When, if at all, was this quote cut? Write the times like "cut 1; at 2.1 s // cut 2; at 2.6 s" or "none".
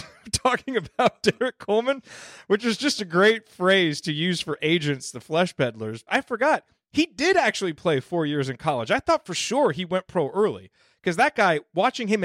cut 1; at 6.1 s